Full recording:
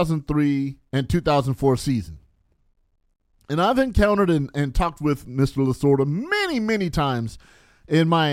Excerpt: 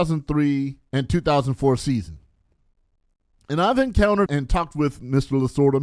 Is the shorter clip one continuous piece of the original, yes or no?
no